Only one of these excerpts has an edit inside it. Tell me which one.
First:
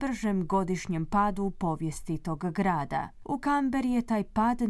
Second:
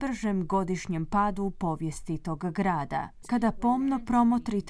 second; 1 cut; at 3.2 s

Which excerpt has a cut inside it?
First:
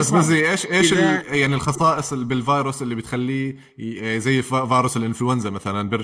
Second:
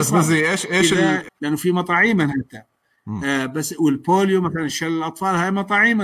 second; 1 cut; at 1.3 s

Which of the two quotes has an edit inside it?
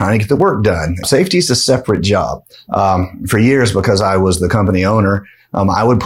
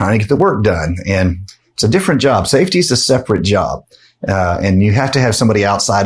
first; 2 cuts; at 1.0 s, 2.5 s

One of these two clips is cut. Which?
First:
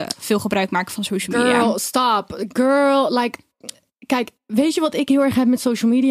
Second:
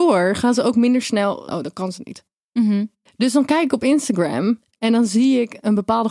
second; 1 cut; at 1.5 s

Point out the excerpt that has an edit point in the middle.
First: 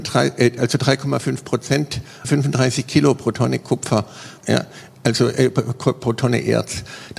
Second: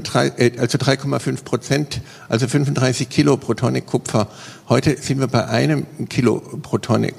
first; 2 cuts; at 2.2 s, 4.4 s

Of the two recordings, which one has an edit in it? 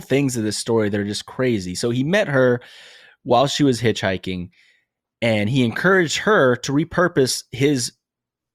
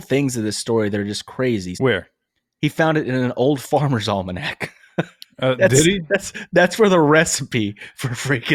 second; 1 cut; at 1.7 s

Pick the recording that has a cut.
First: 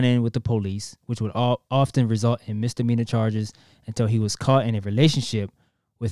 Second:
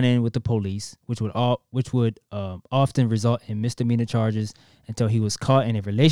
first; 1 cut; at 1.7 s

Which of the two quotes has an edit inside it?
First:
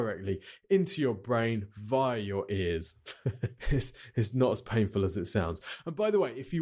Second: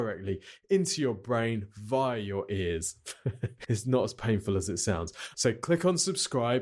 second; 2 cuts; at 3.6 s, 5.3 s

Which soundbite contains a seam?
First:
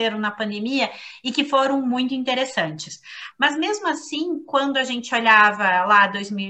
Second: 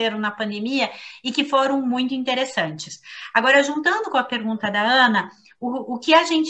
first; 1 cut; at 3.3 s

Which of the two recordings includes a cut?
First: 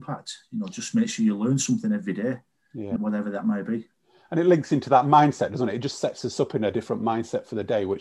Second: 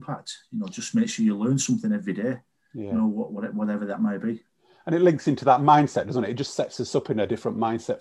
first; 1 cut; at 3.0 s

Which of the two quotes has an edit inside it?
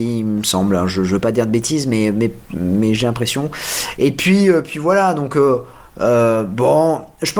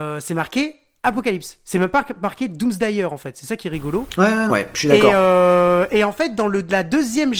second; 1 cut; at 4.5 s

